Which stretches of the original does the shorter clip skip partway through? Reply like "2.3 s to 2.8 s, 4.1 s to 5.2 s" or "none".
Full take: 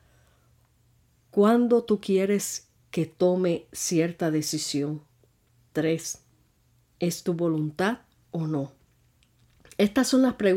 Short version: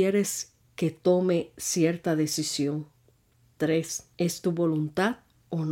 6.3 s to 6.9 s

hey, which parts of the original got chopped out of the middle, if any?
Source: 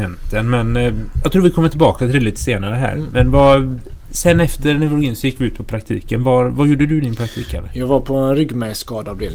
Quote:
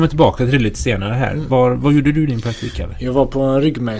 3.1 s to 6.2 s

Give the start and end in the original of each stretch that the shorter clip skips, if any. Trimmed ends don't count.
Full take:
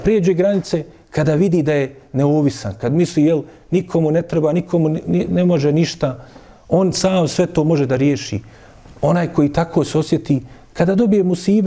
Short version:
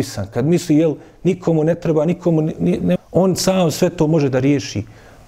5.4 s to 6.5 s

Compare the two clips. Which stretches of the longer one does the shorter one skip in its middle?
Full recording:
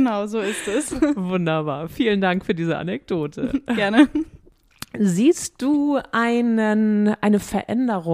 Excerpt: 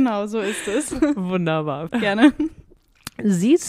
1.9 s to 3.6 s

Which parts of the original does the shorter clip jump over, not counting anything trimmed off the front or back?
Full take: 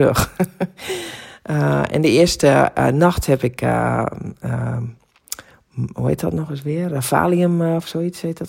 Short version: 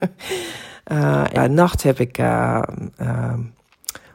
1.9 s to 2.8 s

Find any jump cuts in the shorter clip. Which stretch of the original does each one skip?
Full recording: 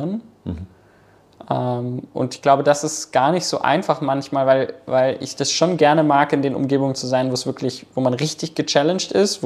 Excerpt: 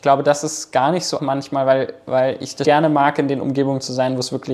3.6 s to 4.0 s, 5.4 s to 5.8 s

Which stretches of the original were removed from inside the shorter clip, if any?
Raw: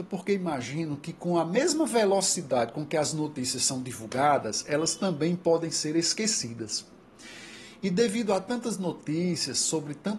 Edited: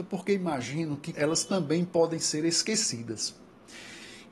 1.1 s to 4.6 s

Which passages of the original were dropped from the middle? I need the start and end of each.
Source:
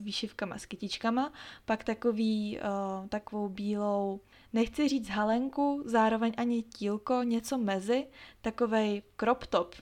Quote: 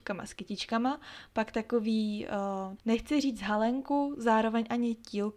3.1 s to 4.4 s

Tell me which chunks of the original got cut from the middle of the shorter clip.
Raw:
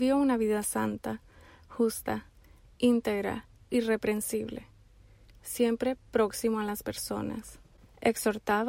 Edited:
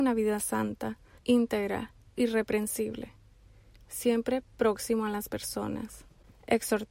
1.4 s to 2.7 s

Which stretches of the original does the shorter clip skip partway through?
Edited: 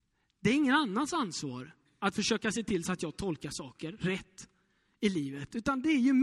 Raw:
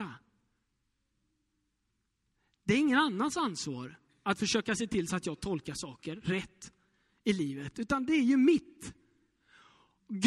none

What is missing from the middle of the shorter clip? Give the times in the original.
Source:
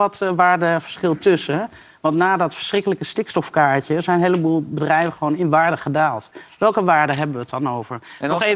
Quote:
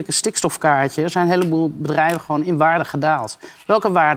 none

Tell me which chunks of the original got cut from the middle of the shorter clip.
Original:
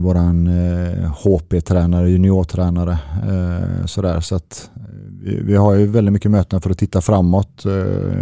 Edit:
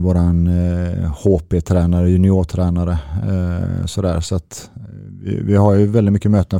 none

